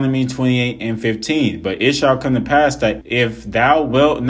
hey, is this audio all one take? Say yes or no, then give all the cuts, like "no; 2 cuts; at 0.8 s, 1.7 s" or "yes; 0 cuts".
no; 1 cut; at 3.0 s